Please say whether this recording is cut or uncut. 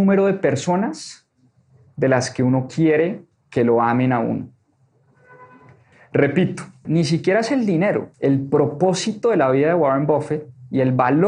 cut